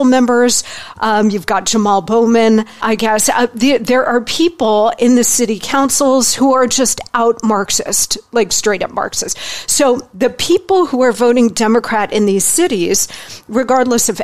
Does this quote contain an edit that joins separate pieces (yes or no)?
yes